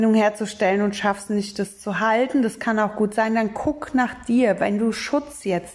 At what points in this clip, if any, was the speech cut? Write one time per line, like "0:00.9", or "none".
none